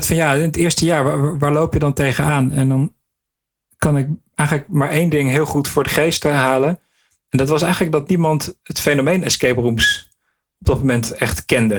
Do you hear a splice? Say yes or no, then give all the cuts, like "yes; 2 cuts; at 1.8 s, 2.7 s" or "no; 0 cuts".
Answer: no; 0 cuts